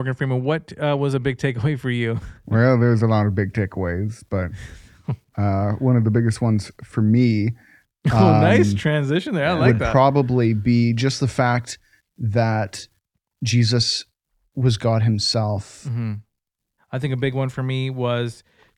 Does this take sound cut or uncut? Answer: cut